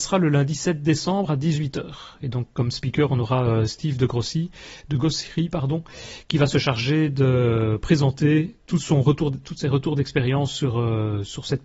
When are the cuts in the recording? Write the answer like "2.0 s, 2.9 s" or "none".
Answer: none